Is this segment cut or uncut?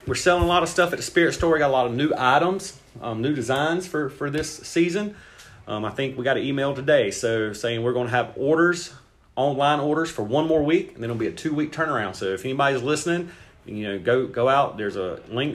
uncut